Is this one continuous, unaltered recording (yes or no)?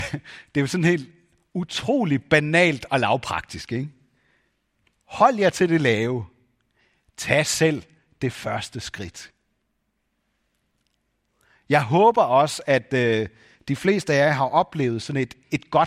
yes